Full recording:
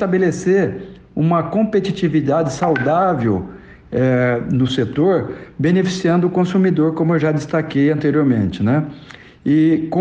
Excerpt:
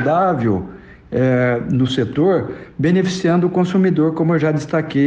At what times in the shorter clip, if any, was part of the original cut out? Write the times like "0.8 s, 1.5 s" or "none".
none